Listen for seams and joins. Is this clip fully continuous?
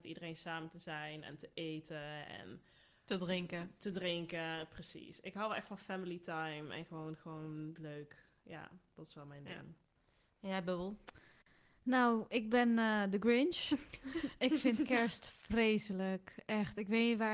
yes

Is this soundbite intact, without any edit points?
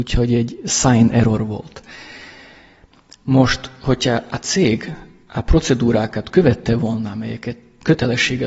yes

